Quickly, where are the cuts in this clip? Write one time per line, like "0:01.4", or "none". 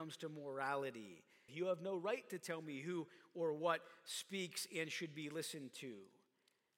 0:01.5